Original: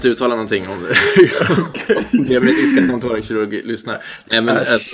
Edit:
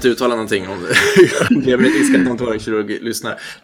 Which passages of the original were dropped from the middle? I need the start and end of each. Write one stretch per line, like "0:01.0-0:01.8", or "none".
0:01.5-0:02.1